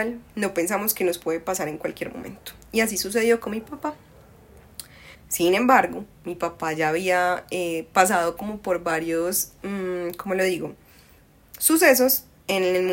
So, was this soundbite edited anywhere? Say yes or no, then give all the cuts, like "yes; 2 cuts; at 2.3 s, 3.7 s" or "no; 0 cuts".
yes; 1 cut; at 5.1 s